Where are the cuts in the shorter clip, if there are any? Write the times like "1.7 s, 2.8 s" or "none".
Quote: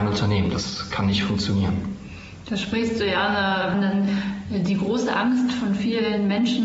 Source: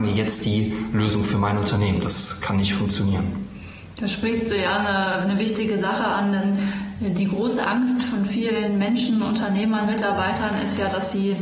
3.7 s